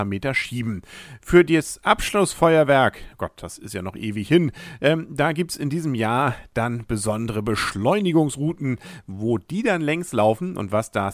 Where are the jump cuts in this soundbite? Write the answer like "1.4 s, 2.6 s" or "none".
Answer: none